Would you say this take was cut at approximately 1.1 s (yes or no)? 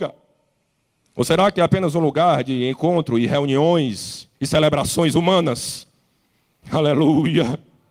yes